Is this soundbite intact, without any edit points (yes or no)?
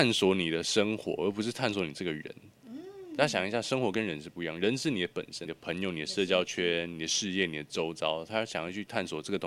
no